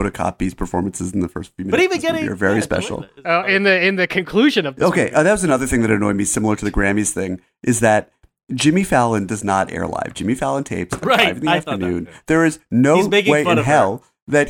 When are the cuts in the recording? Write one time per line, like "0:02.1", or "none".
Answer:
none